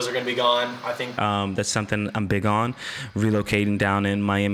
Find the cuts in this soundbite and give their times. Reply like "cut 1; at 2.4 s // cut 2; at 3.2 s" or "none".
cut 1; at 1.2 s